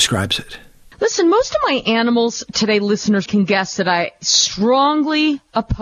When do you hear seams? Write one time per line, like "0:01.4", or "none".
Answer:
0:03.3